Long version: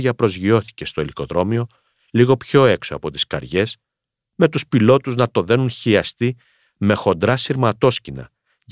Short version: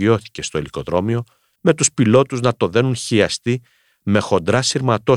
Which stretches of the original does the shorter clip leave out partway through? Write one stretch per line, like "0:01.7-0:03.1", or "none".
0:02.0-0:04.3